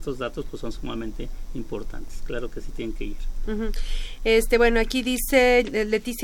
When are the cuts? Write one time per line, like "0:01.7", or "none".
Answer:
none